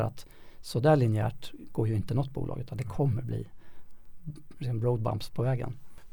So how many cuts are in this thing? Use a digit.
0